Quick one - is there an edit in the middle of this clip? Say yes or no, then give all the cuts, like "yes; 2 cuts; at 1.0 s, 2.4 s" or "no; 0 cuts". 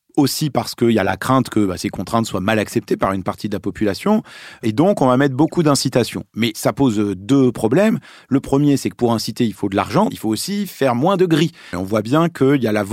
yes; 2 cuts; at 10.1 s, 11.7 s